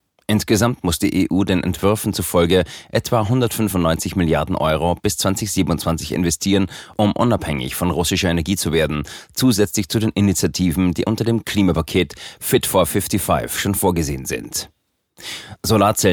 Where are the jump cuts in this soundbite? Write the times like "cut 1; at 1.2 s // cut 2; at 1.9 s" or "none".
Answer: none